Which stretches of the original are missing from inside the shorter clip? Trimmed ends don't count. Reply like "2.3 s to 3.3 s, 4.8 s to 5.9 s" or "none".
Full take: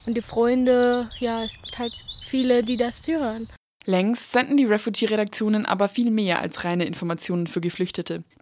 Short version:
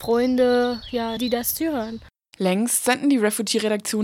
1.5 s to 2.6 s